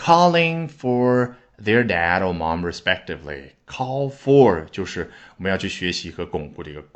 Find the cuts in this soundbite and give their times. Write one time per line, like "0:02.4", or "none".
none